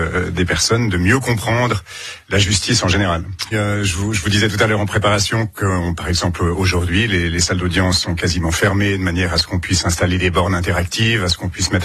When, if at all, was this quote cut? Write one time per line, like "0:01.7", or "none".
0:03.5